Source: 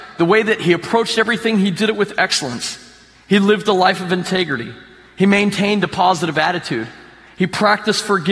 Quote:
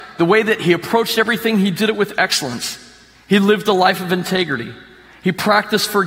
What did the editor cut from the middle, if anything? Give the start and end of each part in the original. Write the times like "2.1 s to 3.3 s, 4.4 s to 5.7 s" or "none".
5.1 s to 7.2 s